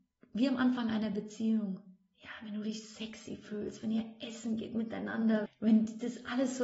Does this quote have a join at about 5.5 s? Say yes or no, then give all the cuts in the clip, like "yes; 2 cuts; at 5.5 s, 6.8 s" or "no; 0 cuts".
yes; 1 cut; at 5.5 s